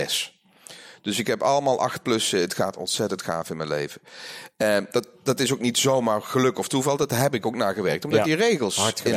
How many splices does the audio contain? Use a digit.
0